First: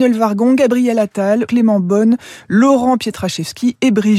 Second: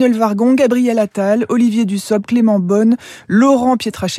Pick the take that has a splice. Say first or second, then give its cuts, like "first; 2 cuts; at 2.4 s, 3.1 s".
first; 1 cut; at 1.5 s